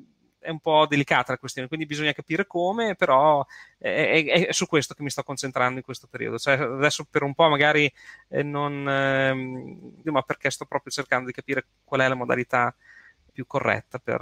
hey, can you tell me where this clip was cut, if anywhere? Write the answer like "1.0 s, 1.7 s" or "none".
10.0 s, 13.3 s